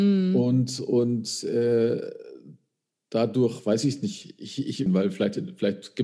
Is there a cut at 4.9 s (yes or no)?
yes